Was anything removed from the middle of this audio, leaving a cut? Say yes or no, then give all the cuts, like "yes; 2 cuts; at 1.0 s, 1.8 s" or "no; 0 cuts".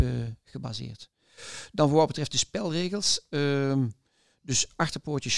no; 0 cuts